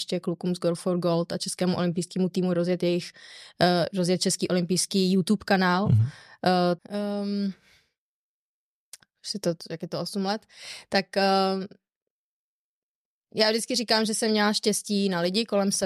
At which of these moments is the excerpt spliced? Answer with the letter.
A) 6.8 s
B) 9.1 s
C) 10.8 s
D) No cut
A